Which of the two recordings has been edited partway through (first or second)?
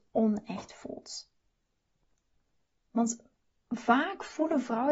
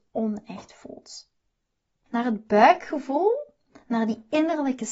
second